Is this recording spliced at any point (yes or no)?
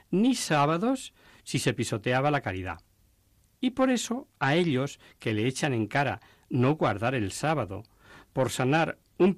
no